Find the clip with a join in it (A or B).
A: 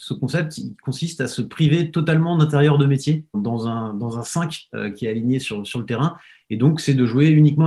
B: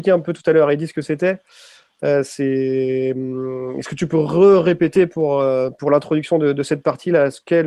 A